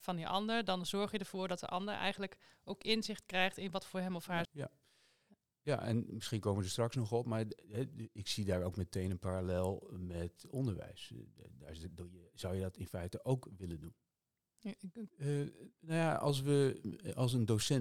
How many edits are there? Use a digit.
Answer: 2